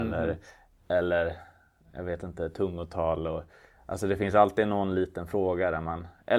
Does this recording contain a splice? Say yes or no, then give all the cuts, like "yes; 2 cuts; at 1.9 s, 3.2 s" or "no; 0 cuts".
no; 0 cuts